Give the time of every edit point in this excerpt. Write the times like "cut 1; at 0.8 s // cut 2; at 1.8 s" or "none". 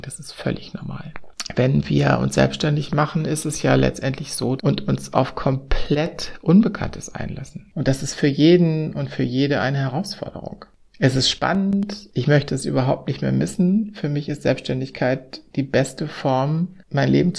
cut 1; at 4.6 s